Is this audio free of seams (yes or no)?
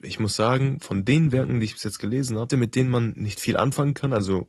no